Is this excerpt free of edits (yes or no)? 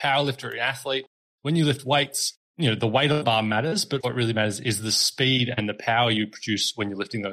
no